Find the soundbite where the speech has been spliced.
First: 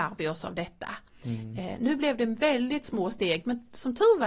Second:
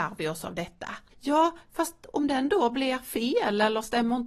second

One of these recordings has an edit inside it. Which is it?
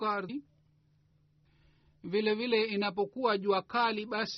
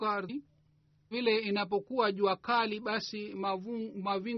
second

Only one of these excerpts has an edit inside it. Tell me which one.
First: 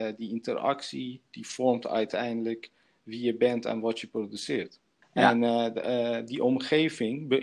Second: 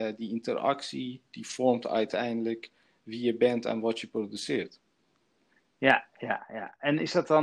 first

